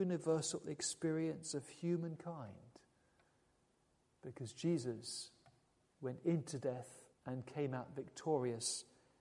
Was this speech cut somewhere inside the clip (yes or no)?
yes